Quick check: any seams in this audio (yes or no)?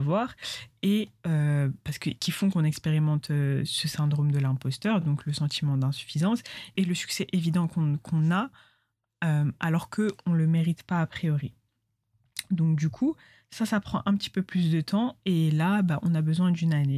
no